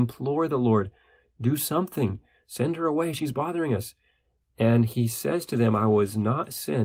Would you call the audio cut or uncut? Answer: uncut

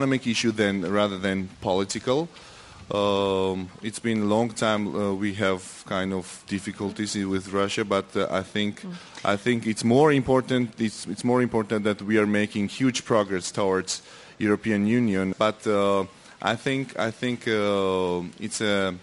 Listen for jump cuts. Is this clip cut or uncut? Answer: cut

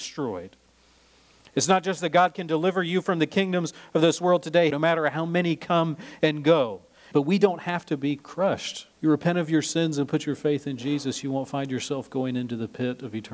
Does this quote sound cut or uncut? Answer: cut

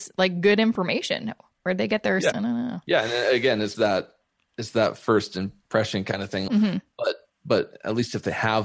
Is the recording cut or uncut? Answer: cut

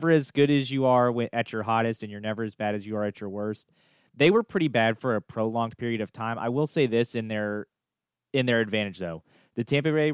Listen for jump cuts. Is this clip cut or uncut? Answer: uncut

